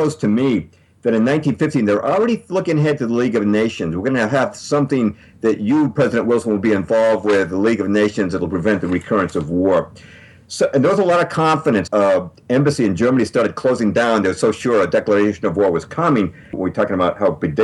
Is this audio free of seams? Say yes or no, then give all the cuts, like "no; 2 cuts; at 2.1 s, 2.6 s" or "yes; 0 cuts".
no; 2 cuts; at 11.9 s, 16.5 s